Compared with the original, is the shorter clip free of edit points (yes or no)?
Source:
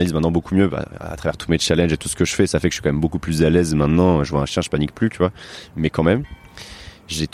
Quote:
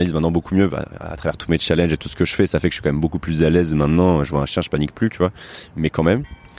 yes